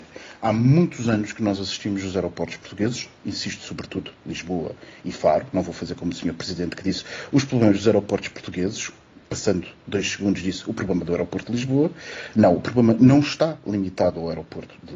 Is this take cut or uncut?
uncut